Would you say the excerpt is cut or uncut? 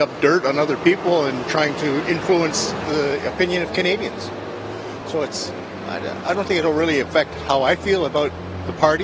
uncut